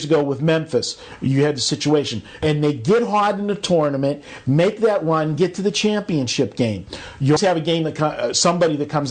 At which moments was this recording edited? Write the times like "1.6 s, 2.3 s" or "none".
2.4 s, 7.4 s